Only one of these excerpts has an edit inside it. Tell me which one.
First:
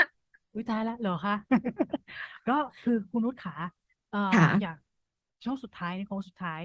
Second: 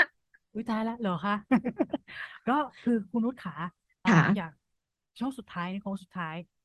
second; 1 cut; at 4.1 s

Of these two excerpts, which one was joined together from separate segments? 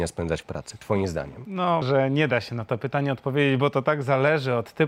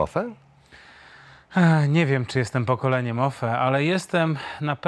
first; 1 cut; at 1.8 s

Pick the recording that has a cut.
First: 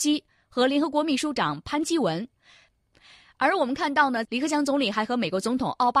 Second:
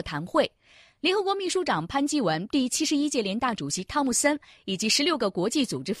first; 2 cuts; at 2.7 s, 4.3 s

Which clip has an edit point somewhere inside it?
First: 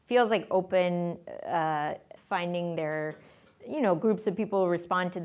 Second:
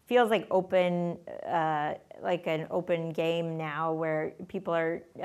first; 1 cut; at 2.2 s

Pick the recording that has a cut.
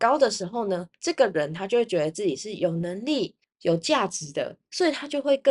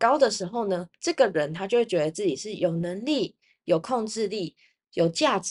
first; 1 cut; at 3.4 s

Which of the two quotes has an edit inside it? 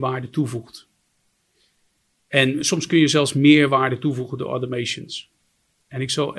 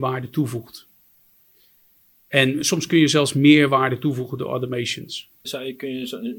second; 1 cut; at 5.4 s

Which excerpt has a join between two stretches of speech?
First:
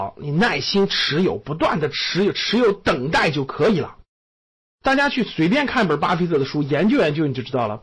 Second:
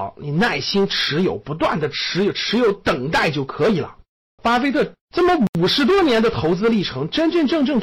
second; 1 cut; at 4.4 s

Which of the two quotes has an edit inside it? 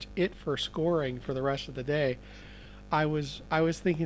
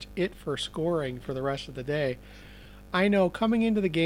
first; 1 cut; at 2.9 s

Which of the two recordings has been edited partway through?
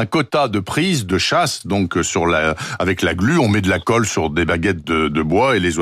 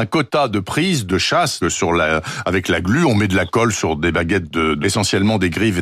second; 2 cuts; at 1.6 s, 4.8 s

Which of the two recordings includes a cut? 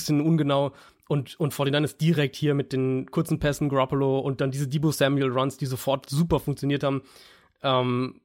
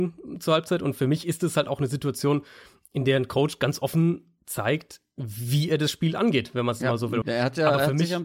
second; 1 cut; at 7.2 s

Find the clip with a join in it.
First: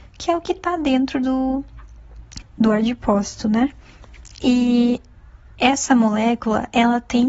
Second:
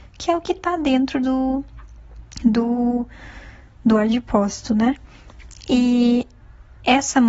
first; 1 cut; at 2.4 s

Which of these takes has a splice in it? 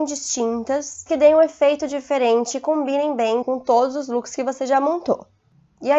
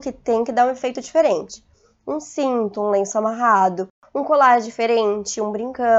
first; 1 cut; at 3.4 s

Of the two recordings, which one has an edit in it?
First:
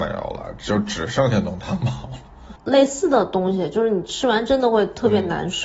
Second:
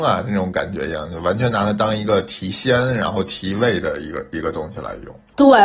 first; 1 cut; at 2.6 s

